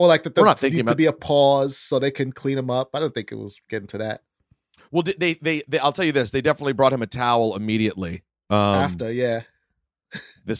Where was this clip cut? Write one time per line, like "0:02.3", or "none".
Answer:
none